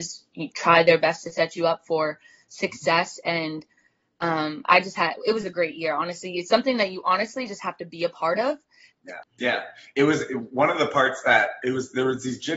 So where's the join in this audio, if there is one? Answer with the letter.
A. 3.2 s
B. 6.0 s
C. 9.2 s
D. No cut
C